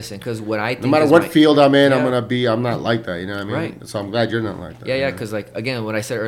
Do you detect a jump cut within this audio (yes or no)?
no